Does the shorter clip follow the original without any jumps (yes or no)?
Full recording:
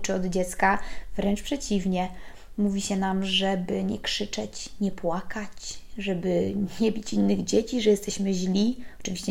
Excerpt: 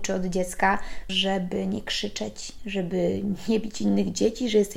no